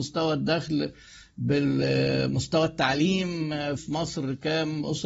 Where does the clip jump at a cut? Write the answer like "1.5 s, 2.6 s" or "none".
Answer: 3.8 s